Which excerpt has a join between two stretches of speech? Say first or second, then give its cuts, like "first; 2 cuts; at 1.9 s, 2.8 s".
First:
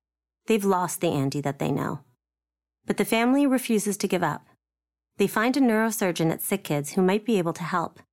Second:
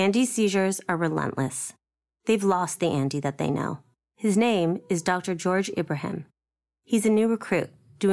second; 1 cut; at 4.1 s